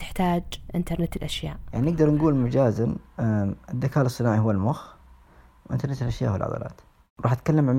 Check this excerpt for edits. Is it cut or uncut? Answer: uncut